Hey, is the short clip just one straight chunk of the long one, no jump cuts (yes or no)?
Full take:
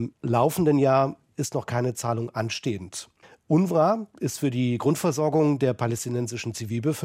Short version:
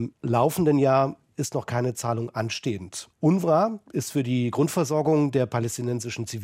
no